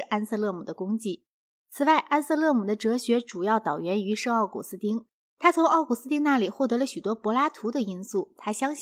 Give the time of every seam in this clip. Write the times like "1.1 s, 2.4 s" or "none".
none